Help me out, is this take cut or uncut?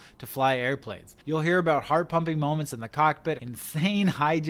cut